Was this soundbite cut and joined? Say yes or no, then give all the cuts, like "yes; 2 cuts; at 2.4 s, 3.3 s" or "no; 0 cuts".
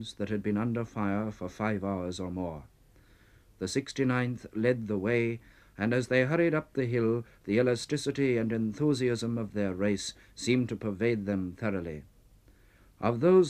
no; 0 cuts